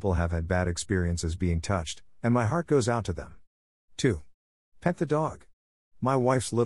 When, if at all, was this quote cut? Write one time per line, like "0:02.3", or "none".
0:03.7